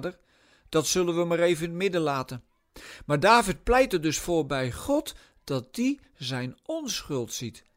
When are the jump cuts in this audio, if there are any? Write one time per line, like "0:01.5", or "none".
none